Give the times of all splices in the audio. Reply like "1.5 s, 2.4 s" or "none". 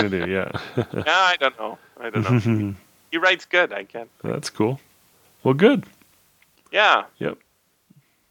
none